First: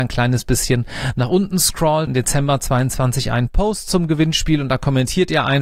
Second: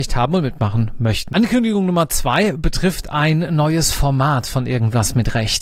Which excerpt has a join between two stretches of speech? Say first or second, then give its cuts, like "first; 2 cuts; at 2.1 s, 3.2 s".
first; 1 cut; at 2.1 s